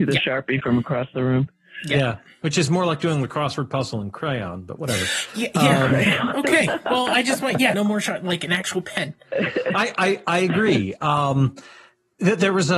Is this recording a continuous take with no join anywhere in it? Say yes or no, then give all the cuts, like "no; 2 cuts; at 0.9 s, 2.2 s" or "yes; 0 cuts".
no; 1 cut; at 7.7 s